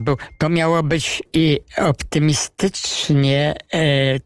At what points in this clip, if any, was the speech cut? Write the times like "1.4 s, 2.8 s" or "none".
1.3 s